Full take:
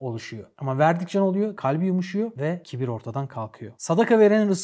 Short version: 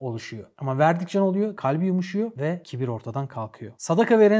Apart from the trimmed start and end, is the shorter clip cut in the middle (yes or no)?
no